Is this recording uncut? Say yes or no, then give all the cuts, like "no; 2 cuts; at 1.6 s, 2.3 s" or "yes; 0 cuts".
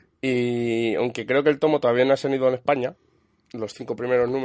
yes; 0 cuts